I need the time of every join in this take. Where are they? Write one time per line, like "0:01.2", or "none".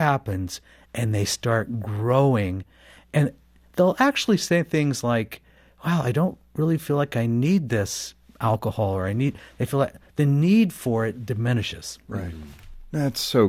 none